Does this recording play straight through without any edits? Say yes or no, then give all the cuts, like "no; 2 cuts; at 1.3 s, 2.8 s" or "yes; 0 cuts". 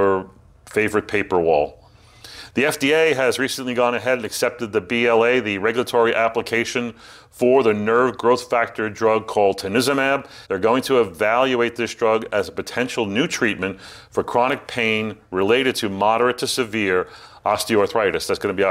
no; 1 cut; at 10.4 s